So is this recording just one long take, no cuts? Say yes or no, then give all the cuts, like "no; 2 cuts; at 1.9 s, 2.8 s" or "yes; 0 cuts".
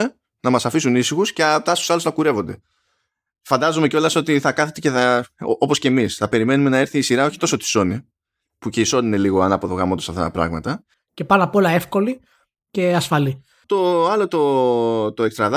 no; 2 cuts; at 10.9 s, 13.6 s